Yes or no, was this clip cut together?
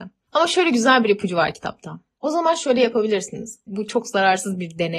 yes